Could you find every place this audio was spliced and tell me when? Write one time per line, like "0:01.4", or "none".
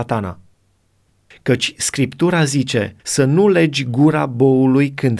0:01.3
0:03.0